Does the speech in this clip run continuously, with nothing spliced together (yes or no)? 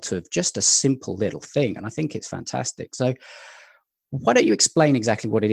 yes